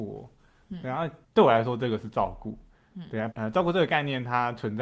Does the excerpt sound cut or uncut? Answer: cut